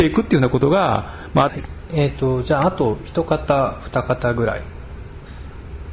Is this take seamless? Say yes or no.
no